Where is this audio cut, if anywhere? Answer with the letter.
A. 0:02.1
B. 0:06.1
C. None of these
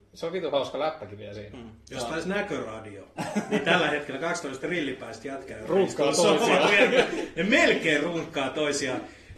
C